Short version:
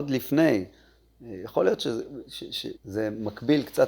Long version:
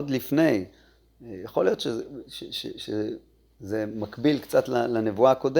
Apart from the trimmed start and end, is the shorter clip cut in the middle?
yes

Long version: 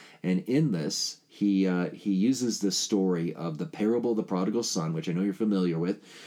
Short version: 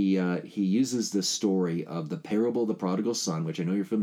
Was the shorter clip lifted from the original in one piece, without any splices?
yes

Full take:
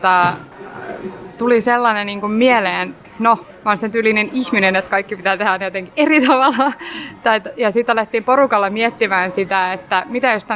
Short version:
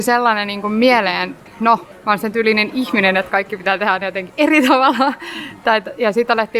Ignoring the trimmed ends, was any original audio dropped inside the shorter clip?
no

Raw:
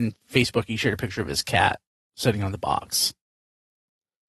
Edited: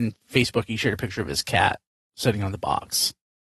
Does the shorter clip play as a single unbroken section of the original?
yes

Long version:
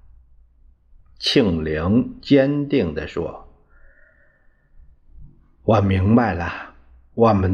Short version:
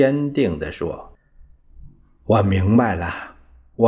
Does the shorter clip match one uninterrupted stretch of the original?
no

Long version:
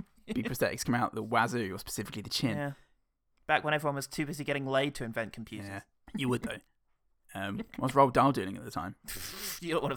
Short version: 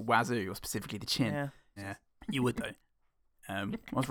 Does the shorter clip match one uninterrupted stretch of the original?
no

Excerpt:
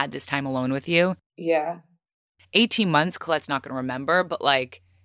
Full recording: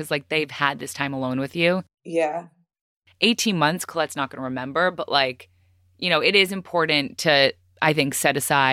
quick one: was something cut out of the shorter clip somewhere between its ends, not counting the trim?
no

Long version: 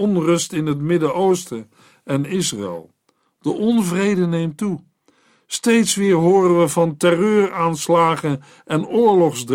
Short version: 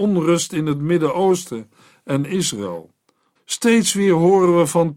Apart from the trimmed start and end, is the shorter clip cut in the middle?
yes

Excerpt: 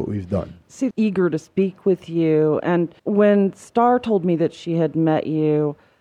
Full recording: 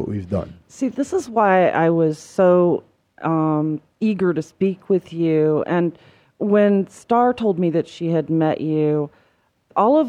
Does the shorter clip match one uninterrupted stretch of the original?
no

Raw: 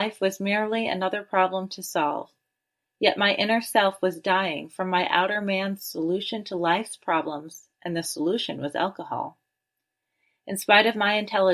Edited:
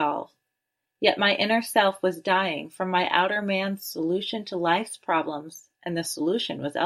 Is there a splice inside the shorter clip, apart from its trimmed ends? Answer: no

